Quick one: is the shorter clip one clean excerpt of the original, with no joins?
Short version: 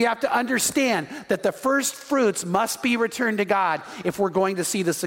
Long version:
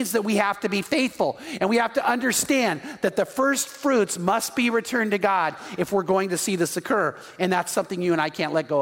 yes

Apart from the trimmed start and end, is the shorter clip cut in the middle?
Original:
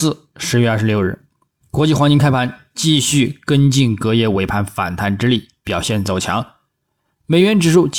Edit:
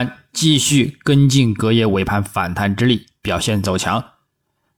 no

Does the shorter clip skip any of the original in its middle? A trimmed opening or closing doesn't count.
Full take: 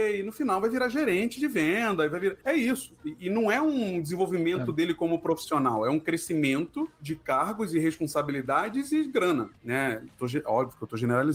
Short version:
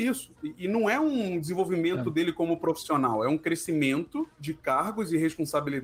no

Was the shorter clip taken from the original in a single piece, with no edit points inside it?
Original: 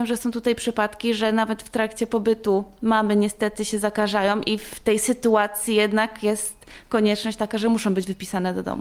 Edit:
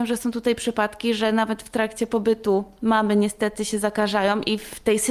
yes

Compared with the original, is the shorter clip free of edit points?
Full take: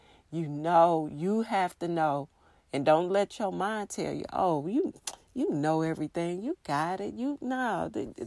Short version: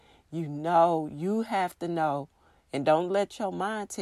yes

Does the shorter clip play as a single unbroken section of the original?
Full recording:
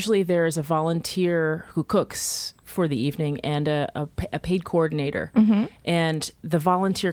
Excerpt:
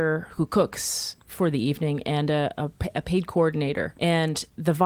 no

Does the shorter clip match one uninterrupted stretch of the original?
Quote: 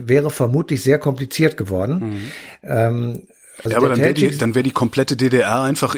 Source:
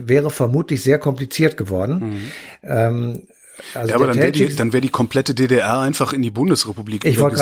no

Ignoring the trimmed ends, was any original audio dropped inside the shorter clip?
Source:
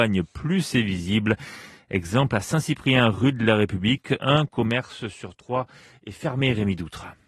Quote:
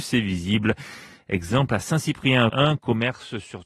yes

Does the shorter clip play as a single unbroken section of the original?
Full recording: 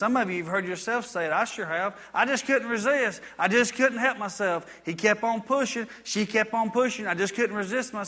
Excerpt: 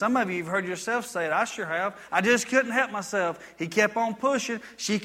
no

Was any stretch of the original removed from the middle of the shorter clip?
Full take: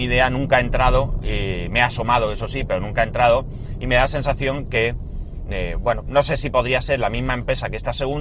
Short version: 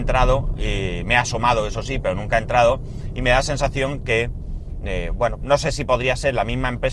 no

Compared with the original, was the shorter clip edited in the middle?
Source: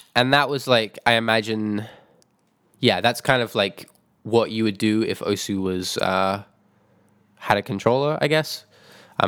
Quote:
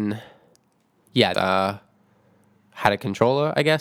yes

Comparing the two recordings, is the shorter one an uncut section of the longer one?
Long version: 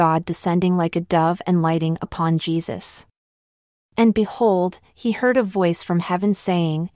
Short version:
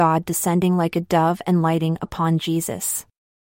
yes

